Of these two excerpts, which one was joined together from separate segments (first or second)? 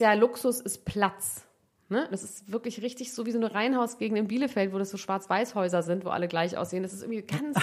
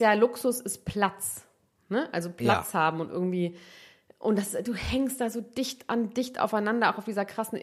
first